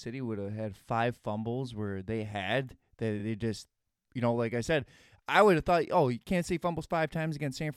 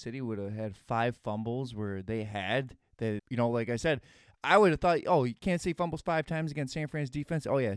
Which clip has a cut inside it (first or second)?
second